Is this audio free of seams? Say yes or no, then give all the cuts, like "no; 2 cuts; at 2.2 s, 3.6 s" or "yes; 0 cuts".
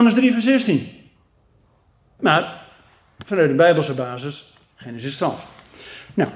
yes; 0 cuts